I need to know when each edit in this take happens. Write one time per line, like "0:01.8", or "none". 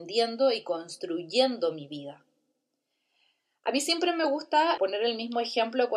0:04.8